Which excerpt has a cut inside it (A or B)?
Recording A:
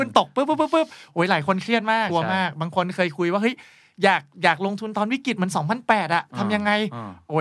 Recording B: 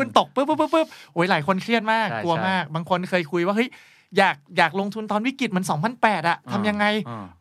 A